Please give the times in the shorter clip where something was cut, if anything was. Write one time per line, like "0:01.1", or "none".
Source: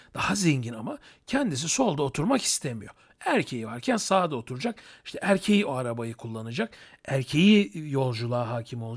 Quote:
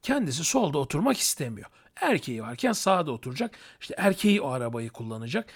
none

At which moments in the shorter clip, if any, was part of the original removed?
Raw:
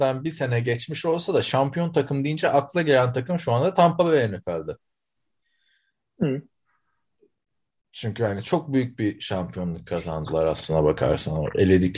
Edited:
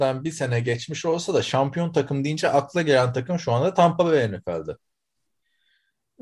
none

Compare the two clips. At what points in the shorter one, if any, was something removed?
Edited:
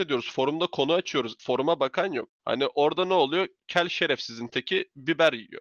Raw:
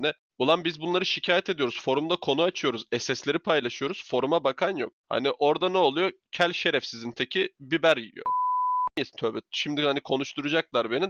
0:01.4

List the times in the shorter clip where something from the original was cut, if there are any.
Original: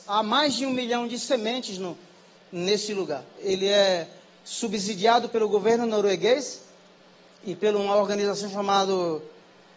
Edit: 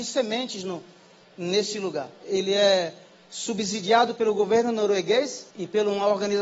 0:05.5

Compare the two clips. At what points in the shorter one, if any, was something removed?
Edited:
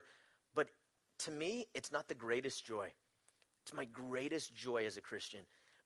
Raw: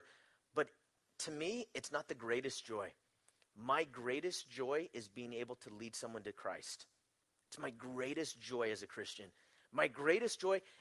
0:03.5

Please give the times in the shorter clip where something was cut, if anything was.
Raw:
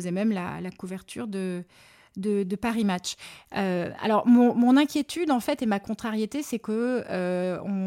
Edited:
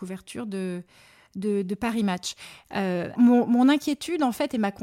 0:03.2

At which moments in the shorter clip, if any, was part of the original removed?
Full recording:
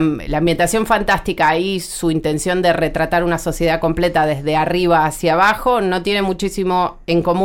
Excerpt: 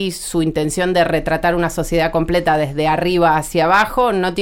none

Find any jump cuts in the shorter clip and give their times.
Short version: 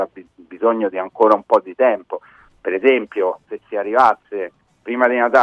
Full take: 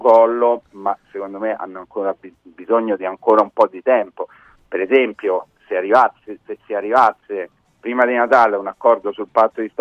0:03.4

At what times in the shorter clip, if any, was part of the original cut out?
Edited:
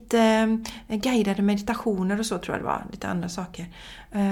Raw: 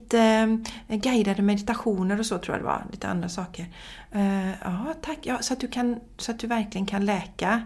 none

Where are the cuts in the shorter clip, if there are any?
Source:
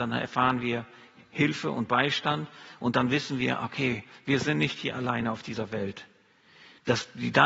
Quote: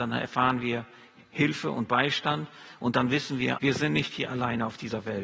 0:03.6

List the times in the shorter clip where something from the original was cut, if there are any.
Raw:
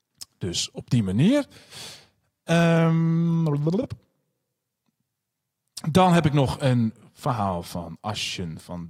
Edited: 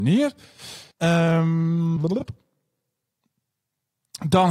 0:00.9
0:02.0

